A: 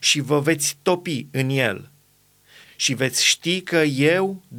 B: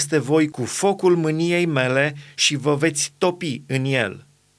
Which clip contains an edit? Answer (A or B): A